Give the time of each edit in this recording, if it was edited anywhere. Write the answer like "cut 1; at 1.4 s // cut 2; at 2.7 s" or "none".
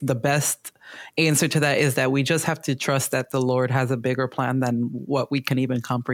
none